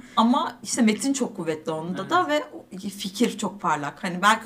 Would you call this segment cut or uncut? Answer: uncut